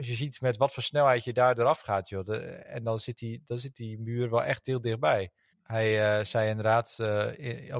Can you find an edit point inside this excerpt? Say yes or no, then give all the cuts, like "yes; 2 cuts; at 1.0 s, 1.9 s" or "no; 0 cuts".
yes; 1 cut; at 5.5 s